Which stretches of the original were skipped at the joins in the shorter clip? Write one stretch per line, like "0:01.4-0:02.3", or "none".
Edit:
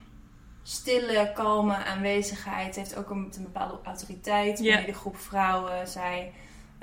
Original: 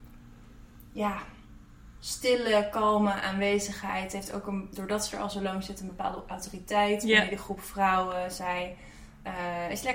0:04.7-0:05.7